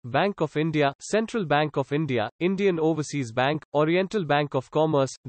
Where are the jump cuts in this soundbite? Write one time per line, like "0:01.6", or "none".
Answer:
none